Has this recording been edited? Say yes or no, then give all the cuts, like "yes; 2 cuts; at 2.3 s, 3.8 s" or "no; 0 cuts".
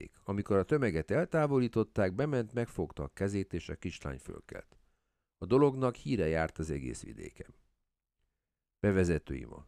no; 0 cuts